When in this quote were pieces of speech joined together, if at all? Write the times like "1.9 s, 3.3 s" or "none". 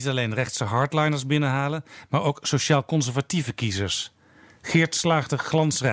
none